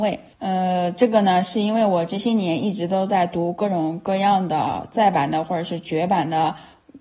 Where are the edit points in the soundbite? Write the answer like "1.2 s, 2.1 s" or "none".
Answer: none